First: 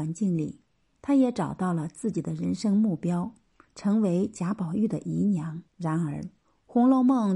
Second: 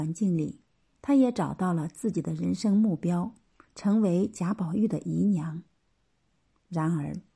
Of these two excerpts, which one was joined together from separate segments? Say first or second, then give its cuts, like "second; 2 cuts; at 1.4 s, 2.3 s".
first; 1 cut; at 5.7 s